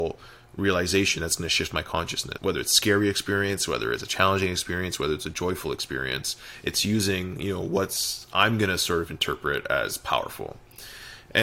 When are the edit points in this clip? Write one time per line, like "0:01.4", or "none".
0:02.4